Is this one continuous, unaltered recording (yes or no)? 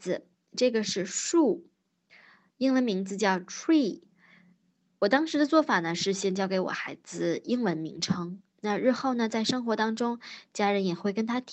yes